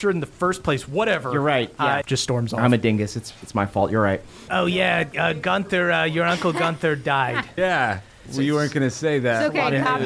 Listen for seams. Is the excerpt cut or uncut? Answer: cut